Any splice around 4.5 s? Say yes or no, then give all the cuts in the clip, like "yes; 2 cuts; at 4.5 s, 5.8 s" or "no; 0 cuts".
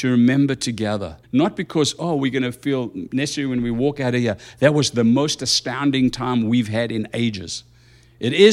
no; 1 cut; at 1.2 s